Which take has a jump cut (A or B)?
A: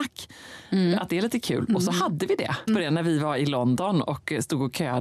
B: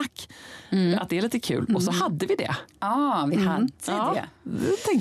A